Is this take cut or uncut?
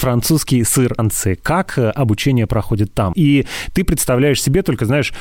cut